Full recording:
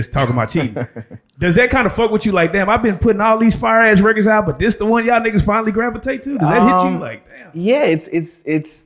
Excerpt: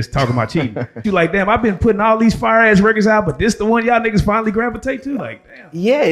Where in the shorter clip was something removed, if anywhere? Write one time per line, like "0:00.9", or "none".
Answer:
0:01.0
0:05.2